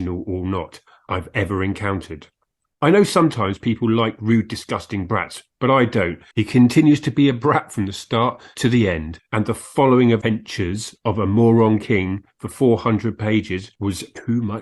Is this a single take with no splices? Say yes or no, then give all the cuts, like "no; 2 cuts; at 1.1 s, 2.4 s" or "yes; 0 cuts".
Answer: no; 2 cuts; at 6.3 s, 9.2 s